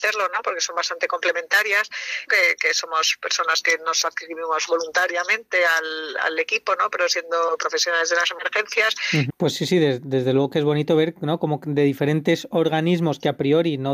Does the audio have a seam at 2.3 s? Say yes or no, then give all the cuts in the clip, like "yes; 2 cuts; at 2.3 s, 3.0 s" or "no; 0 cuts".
yes; 2 cuts; at 2.3 s, 9.3 s